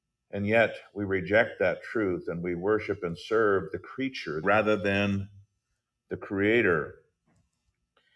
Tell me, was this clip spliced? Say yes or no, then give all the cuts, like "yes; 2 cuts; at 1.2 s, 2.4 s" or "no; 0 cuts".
yes; 1 cut; at 4.4 s